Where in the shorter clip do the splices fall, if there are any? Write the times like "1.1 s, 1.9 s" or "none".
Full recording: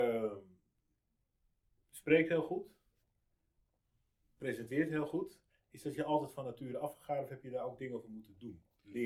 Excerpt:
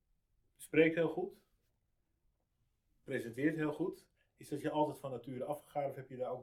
none